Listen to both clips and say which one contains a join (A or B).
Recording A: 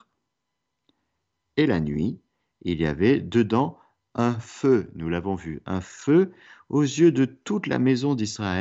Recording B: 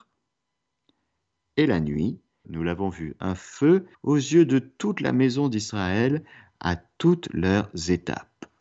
B